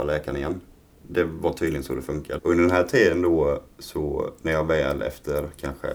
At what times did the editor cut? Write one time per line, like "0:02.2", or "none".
0:02.4